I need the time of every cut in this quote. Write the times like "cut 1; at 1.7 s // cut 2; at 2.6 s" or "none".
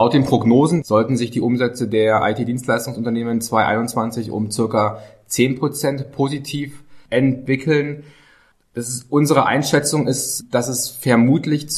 none

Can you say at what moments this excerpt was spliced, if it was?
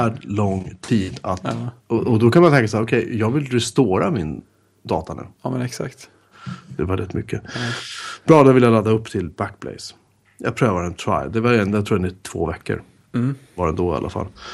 cut 1; at 1.8 s // cut 2; at 6.8 s

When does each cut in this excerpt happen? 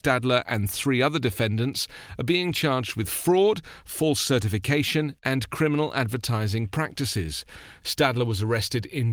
cut 1; at 7.8 s

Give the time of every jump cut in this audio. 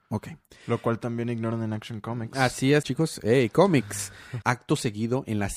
cut 1; at 2.8 s // cut 2; at 4.4 s

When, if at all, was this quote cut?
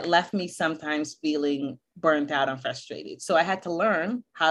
none

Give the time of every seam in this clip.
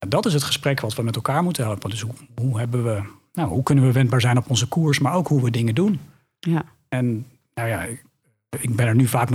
none

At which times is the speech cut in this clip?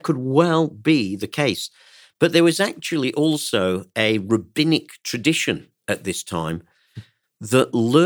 none

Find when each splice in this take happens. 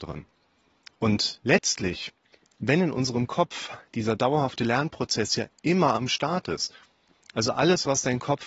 none

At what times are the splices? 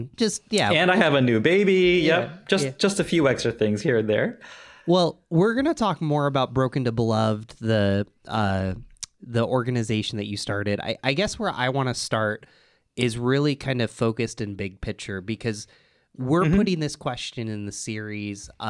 none

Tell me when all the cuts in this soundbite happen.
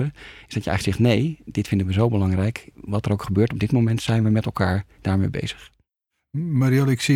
none

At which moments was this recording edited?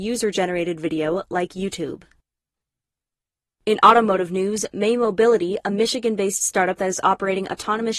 none

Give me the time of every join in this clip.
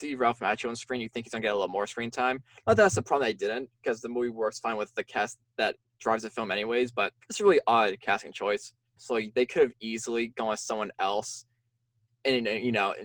cut 1; at 7.2 s // cut 2; at 9.0 s

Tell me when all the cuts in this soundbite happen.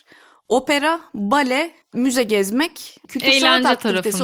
cut 1; at 1.8 s // cut 2; at 3.0 s

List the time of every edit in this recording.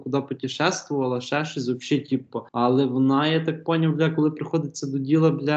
cut 1; at 2.5 s

